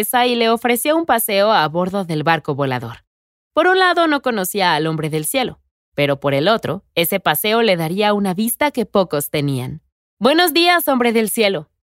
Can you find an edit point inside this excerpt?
yes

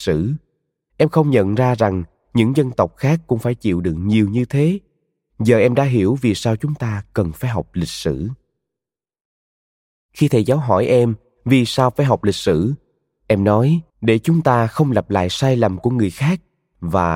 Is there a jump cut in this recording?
yes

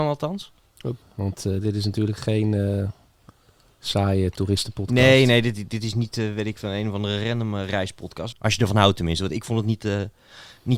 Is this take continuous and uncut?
no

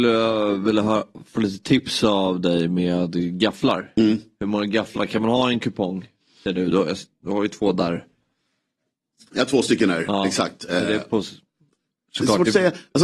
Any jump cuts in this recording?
no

